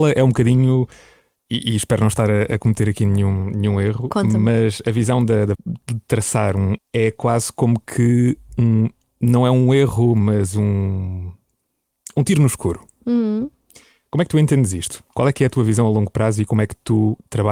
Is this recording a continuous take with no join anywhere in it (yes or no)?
no